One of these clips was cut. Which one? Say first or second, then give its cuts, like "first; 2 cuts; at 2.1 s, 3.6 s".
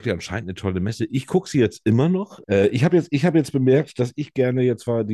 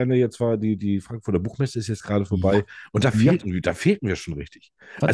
first; 1 cut; at 2.4 s